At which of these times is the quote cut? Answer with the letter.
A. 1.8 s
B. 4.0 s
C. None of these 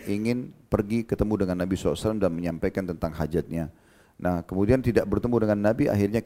C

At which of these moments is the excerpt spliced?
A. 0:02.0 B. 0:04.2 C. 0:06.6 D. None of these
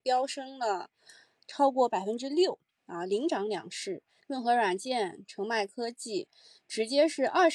B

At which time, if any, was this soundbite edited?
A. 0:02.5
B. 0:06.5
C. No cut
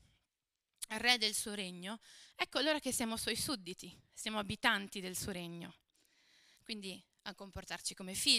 B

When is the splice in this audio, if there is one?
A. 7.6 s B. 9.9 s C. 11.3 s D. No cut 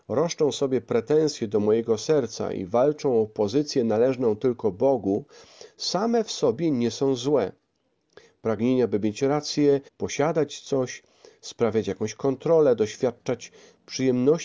B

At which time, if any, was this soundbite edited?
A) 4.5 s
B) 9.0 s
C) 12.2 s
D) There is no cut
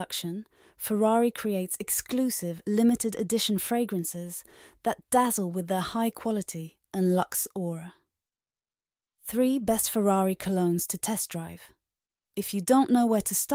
C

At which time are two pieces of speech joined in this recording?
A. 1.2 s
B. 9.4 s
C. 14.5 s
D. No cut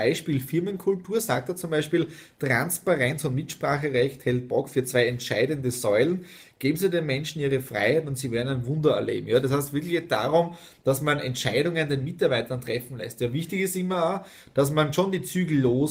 D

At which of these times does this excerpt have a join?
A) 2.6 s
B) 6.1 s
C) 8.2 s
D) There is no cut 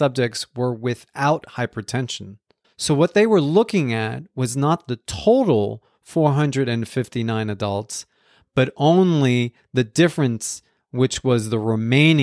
A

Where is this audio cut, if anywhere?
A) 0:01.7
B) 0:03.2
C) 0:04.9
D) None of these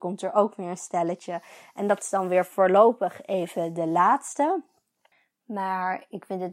D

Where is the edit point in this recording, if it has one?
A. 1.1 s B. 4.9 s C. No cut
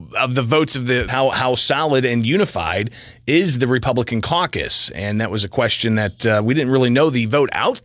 A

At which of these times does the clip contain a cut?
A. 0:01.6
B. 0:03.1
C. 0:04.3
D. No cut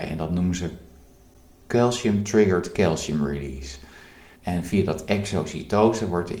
C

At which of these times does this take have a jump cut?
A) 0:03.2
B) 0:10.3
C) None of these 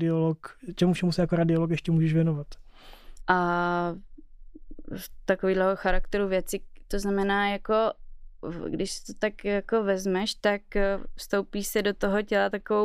A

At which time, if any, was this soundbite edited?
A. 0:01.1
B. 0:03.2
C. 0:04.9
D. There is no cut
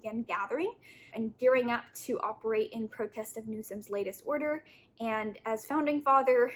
A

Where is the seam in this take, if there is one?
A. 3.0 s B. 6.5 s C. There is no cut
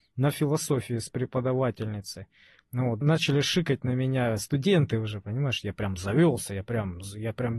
A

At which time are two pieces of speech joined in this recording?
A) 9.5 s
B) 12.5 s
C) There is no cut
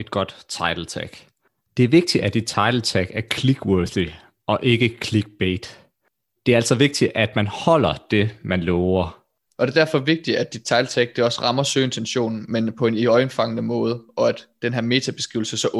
A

